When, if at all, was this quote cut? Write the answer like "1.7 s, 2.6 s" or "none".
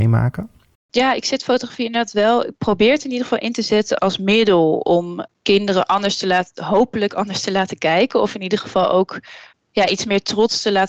4.0 s